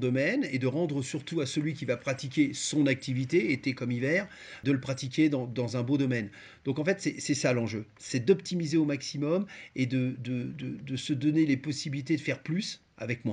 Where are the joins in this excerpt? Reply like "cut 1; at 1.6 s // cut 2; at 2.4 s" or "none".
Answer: none

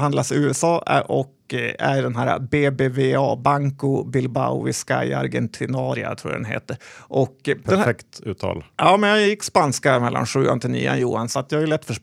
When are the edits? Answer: none

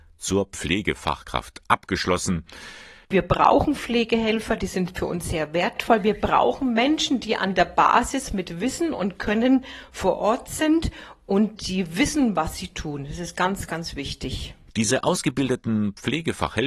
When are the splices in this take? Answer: cut 1; at 3.0 s

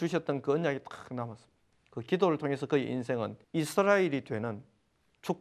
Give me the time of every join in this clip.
cut 1; at 1.7 s // cut 2; at 3.4 s

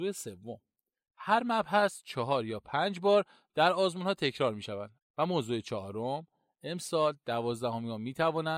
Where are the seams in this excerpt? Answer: cut 1; at 5.0 s

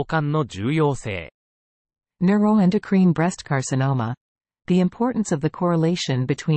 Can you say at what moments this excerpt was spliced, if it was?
none

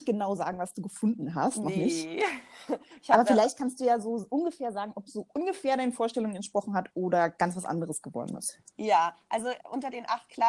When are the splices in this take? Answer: cut 1; at 9.6 s

